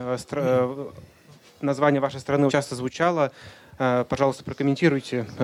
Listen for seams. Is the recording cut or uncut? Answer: cut